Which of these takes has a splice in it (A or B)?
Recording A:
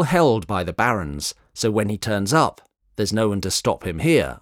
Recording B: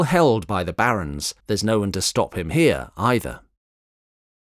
B